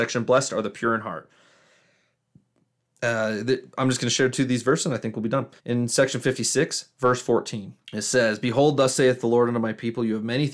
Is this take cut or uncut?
cut